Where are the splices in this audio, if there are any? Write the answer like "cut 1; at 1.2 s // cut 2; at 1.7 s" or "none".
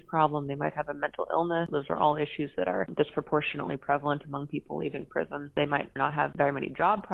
none